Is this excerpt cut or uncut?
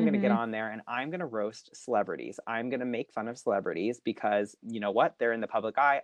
uncut